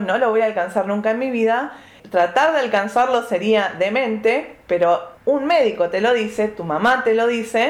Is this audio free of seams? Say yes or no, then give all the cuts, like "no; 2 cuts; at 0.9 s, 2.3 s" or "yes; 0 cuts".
no; 1 cut; at 5.2 s